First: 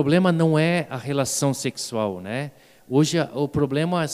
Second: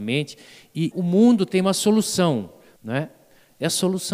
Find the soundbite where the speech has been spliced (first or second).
second